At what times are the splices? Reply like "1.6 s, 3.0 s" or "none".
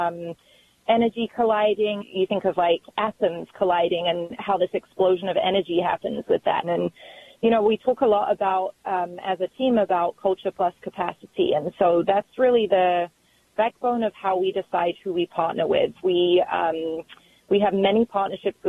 2.0 s, 6.6 s